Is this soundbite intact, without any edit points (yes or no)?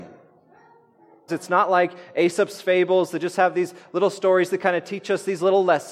no